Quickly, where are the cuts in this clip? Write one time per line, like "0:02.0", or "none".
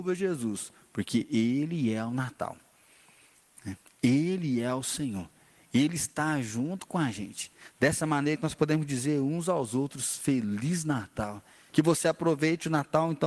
0:08.4
0:11.7

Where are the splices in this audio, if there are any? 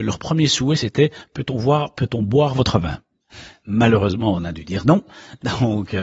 none

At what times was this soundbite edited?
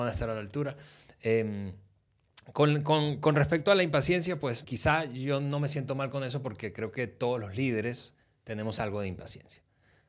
0:04.6

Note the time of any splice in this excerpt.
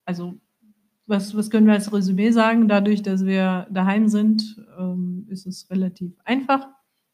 none

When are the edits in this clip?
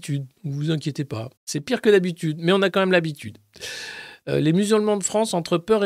0:01.4

